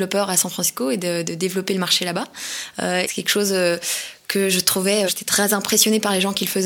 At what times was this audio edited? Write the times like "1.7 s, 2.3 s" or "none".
3.0 s, 5.1 s